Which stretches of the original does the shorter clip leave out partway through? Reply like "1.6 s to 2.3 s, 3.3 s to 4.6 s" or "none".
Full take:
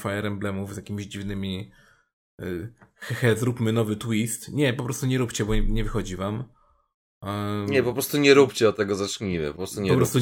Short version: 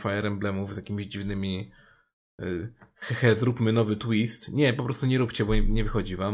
none